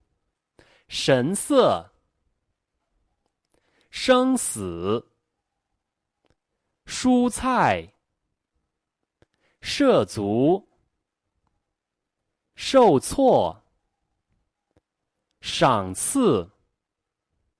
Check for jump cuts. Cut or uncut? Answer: uncut